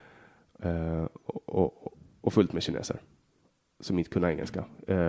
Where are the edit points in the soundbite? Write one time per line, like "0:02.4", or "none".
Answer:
none